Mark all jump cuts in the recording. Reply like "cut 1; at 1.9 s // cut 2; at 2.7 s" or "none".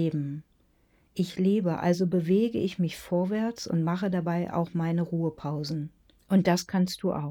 cut 1; at 6.2 s